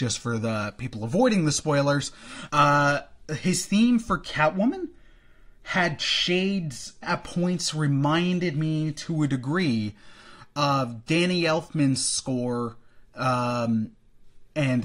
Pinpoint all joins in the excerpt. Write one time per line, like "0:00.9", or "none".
0:02.5
0:07.0